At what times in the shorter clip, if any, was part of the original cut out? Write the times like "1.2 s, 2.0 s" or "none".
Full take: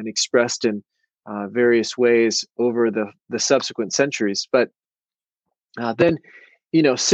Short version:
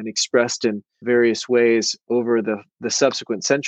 1.0 s